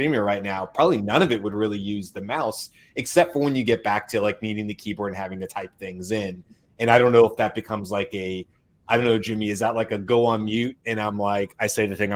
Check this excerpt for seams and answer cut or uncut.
uncut